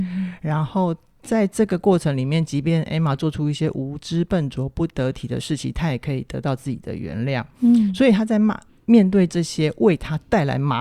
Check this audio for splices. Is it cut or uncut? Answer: uncut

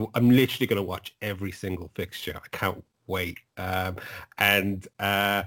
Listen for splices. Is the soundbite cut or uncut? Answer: uncut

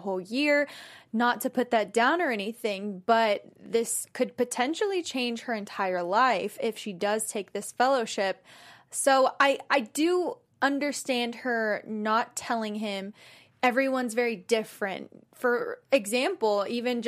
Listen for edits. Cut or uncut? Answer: uncut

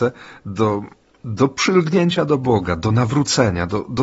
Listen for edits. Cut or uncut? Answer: uncut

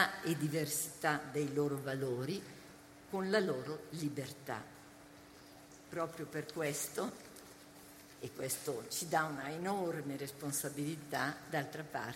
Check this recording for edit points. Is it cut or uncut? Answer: uncut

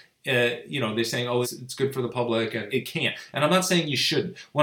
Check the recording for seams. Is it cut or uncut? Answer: cut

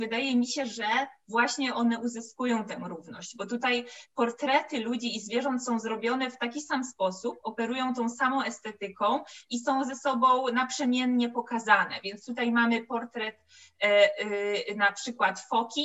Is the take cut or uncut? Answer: uncut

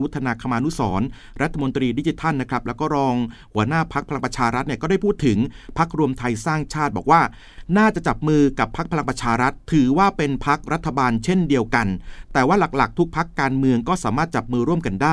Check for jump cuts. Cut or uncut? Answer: uncut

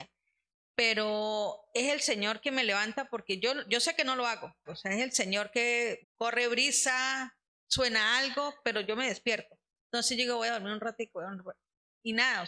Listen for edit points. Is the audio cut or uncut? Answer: cut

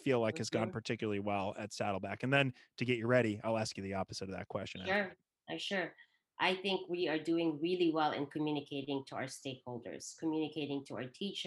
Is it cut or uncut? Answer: uncut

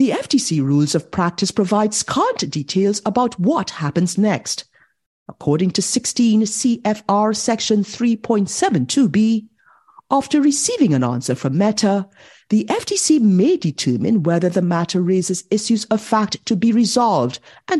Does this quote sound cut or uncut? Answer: uncut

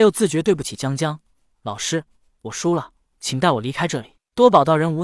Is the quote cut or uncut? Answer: cut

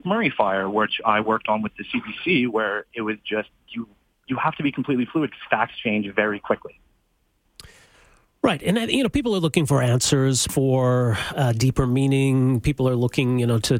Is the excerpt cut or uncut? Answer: cut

